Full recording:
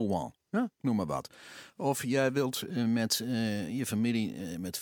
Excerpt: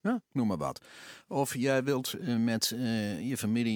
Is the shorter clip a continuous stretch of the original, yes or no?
yes